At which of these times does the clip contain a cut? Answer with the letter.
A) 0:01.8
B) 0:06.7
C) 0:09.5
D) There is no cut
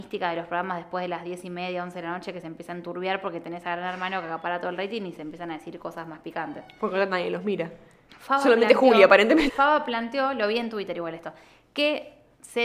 C